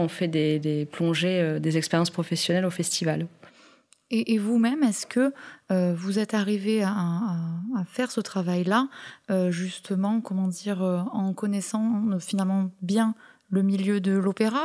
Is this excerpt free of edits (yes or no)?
yes